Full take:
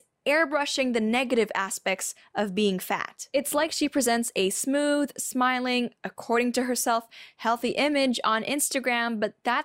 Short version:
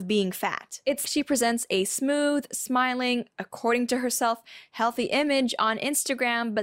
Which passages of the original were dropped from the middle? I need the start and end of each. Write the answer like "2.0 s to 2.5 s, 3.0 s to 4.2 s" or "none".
3.5 s to 3.7 s